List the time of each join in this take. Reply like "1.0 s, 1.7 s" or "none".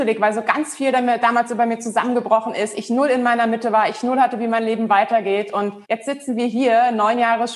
5.8 s